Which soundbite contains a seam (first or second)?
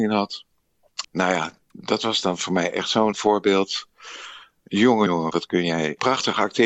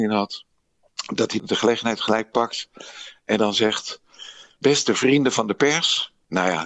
first